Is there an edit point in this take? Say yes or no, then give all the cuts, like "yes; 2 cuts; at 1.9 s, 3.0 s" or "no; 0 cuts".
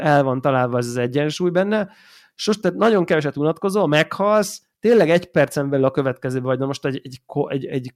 no; 0 cuts